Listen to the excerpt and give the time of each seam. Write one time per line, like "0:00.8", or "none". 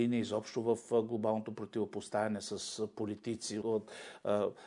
0:03.6

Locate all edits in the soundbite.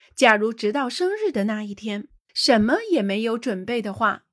0:02.3

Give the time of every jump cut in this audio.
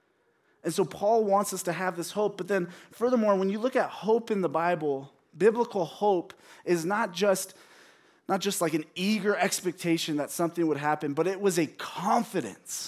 none

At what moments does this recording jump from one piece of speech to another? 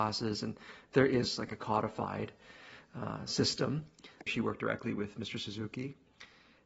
0:04.3

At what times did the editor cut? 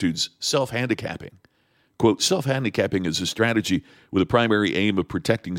none

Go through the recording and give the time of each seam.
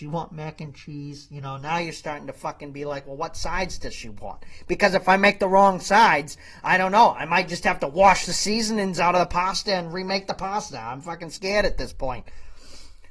none

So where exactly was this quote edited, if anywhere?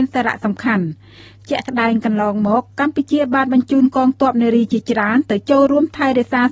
none

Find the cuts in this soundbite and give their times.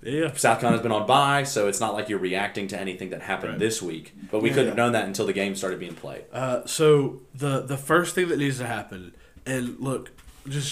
0:04.3

